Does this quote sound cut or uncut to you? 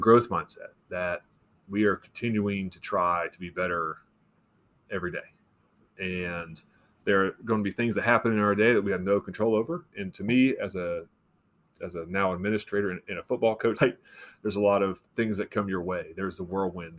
cut